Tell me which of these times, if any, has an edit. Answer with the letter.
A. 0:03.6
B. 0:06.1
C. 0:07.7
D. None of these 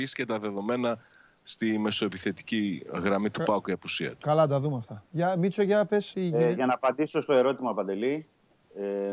B